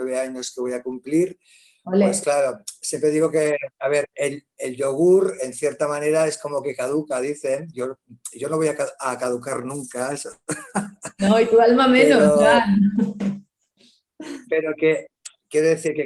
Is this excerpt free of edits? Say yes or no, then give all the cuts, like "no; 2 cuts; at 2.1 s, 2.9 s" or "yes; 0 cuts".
yes; 0 cuts